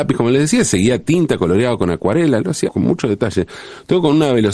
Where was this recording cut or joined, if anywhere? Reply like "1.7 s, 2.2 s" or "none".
2.7 s